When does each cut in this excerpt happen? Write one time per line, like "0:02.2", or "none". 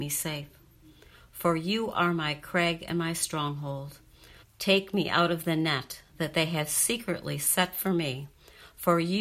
0:04.4